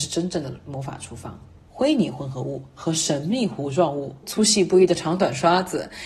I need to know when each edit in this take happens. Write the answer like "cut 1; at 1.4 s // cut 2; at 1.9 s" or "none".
cut 1; at 1.7 s // cut 2; at 4.2 s